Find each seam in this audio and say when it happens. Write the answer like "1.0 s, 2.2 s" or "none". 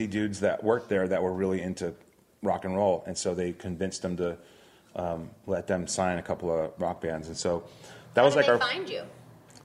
none